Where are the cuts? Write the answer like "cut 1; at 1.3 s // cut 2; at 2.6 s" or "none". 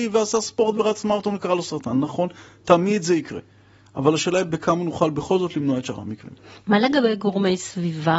none

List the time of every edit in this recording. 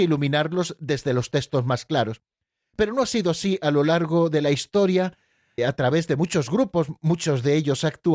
cut 1; at 5.6 s

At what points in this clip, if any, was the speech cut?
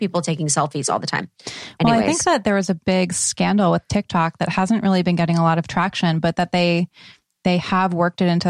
none

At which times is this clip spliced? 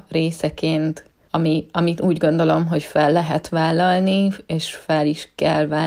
none

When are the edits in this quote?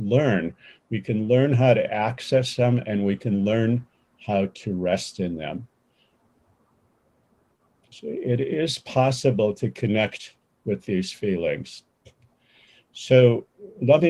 cut 1; at 7.9 s

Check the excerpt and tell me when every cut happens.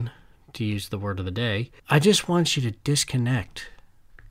cut 1; at 1.8 s

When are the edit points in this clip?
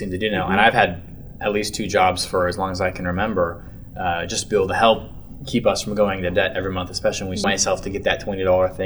cut 1; at 7.4 s

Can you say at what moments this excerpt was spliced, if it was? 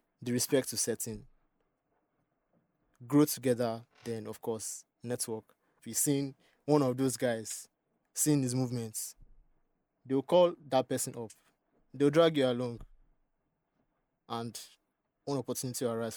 cut 1; at 5.8 s

